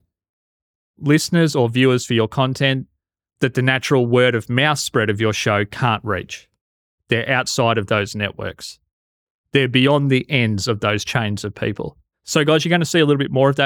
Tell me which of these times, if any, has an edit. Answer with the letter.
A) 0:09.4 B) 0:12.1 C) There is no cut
B